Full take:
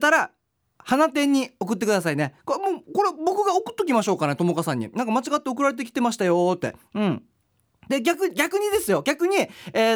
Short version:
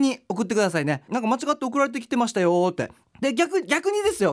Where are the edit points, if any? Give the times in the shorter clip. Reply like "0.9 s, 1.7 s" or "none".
1.1 s, 3.0 s